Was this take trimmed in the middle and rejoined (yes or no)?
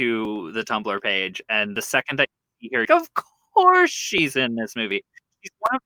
yes